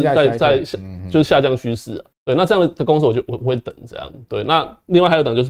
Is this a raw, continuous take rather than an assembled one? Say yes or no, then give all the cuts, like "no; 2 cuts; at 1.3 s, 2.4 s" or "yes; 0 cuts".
no; 2 cuts; at 2.1 s, 4.1 s